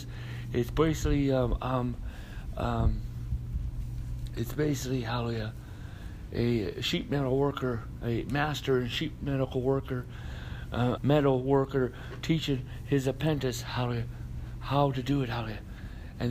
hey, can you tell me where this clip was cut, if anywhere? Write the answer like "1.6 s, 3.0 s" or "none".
11.0 s